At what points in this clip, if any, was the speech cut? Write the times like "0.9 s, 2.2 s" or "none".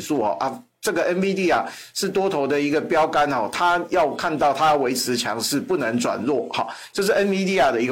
none